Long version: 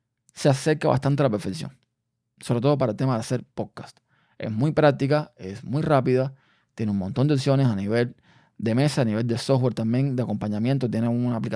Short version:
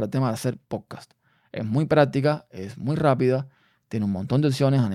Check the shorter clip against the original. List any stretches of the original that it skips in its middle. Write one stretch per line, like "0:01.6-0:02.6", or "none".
none